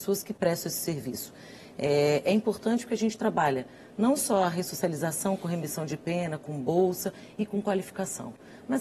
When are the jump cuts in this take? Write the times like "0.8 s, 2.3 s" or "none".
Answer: none